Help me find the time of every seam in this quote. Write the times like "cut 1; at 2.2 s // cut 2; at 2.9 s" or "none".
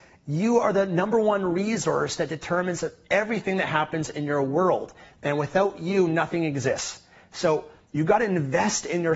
none